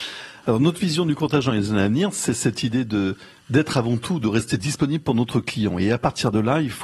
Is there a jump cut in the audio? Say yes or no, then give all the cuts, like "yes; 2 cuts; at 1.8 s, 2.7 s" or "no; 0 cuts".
no; 0 cuts